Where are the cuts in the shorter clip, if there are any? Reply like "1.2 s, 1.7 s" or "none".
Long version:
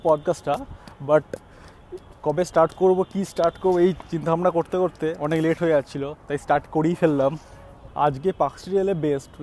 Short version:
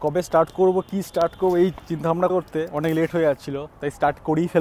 2.3 s